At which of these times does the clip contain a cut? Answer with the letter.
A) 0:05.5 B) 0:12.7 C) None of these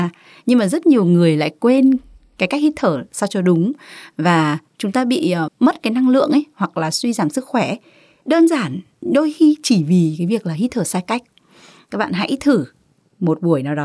A